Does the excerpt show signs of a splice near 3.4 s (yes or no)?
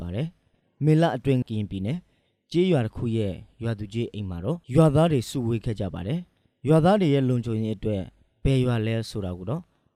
no